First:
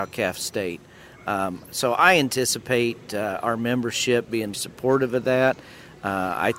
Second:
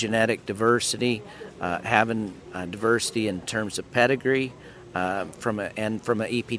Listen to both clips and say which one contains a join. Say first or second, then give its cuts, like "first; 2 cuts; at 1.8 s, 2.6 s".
first; 1 cut; at 4.5 s